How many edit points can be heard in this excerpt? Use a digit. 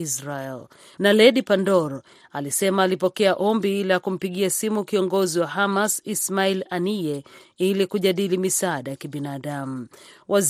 1